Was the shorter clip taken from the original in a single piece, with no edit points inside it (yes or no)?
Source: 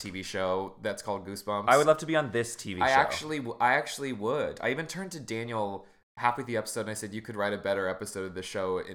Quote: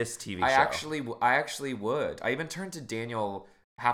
yes